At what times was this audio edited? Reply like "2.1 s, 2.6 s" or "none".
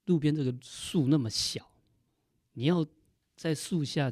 none